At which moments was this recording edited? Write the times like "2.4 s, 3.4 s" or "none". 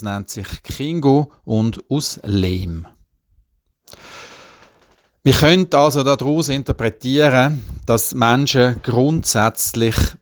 none